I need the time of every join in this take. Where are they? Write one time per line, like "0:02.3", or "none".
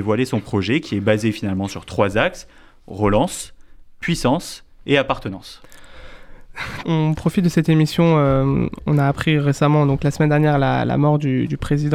0:06.8

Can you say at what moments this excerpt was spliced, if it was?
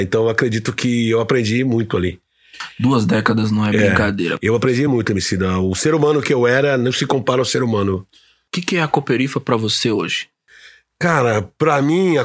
none

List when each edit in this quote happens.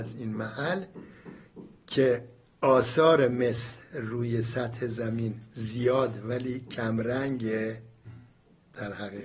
none

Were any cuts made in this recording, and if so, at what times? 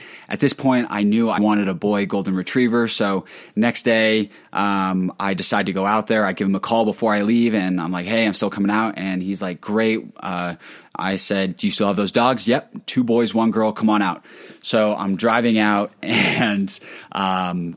0:01.4

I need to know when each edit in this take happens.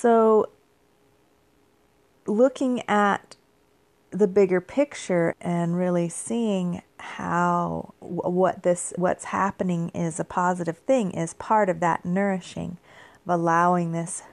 0:05.3
0:06.9
0:08.0

